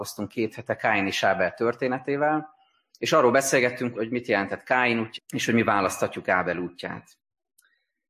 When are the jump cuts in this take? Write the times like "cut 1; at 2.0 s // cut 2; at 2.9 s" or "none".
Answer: cut 1; at 3.9 s // cut 2; at 5.2 s